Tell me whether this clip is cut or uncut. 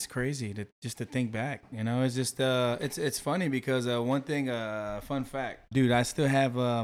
cut